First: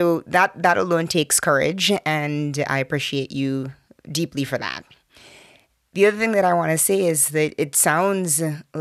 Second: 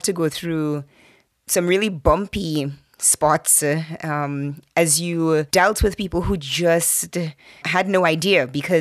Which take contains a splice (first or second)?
second